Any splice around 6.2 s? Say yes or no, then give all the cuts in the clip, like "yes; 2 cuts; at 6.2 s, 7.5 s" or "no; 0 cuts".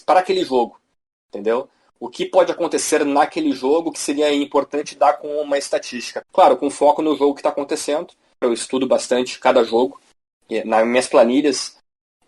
yes; 3 cuts; at 6.2 s, 8.4 s, 10.3 s